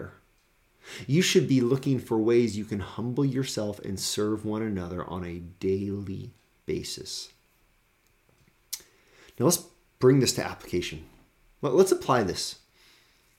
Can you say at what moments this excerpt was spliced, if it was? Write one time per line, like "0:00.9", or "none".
none